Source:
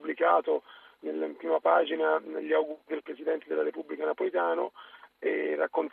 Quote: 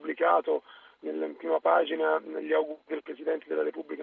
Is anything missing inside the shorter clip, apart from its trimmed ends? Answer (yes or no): no